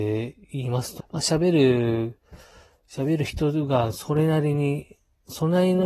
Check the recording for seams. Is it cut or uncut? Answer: cut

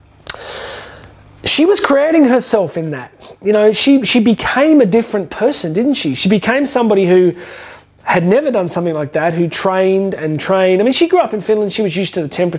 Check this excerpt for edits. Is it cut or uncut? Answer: uncut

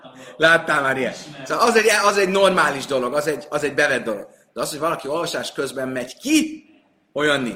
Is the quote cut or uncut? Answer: uncut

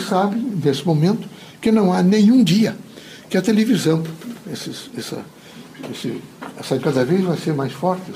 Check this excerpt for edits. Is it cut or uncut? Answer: cut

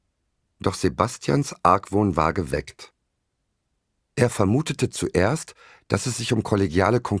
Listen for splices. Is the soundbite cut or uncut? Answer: cut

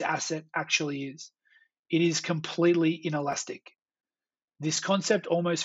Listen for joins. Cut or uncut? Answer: uncut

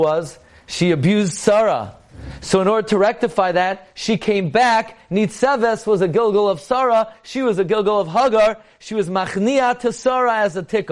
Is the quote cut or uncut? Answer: uncut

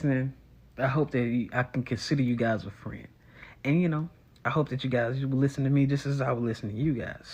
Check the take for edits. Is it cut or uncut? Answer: uncut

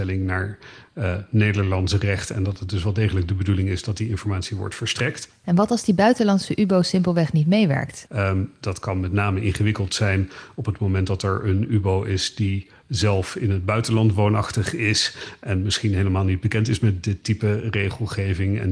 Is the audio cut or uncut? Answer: cut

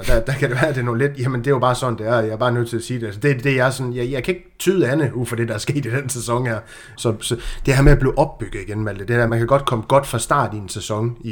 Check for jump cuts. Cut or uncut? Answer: cut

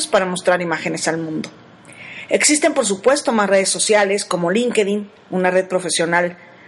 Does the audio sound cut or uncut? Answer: uncut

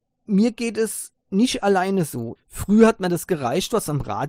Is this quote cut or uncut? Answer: cut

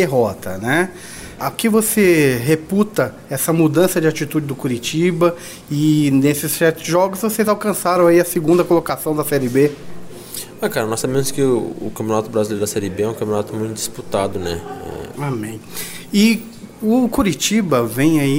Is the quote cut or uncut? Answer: cut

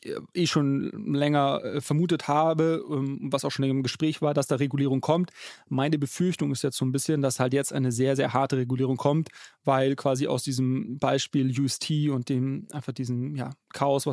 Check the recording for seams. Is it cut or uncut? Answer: uncut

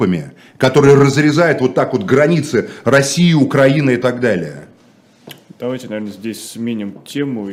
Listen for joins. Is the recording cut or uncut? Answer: uncut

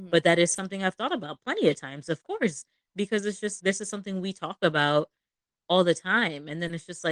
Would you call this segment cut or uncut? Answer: cut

